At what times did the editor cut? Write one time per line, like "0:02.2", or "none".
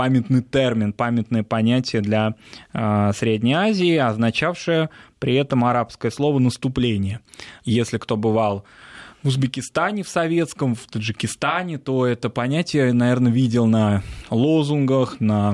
0:07.6